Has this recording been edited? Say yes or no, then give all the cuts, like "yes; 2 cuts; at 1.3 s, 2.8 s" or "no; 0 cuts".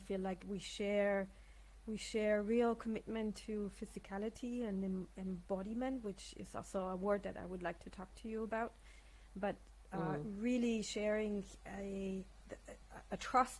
no; 0 cuts